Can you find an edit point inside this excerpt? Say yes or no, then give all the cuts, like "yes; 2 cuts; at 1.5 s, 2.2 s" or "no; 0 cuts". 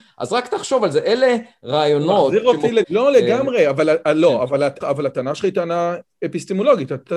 yes; 2 cuts; at 2.8 s, 4.8 s